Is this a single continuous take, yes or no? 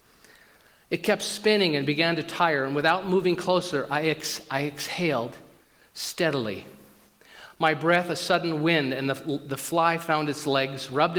yes